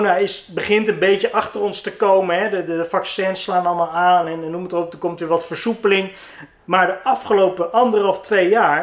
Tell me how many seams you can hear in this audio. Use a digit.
0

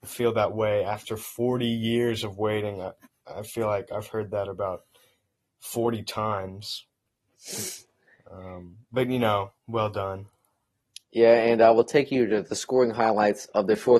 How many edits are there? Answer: 1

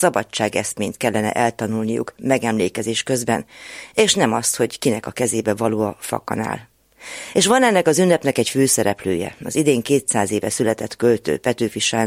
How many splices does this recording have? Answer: 0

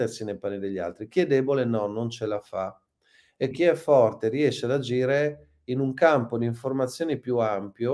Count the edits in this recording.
1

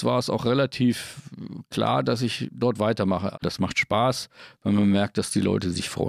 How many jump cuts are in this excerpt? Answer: 1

